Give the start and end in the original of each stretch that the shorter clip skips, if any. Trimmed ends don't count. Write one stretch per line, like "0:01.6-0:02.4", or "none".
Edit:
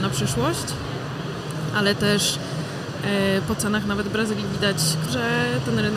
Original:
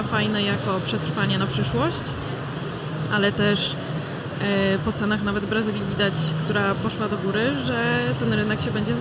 0:06.5-0:07.6